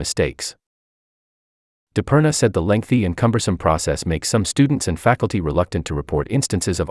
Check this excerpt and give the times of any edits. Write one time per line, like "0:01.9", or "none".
none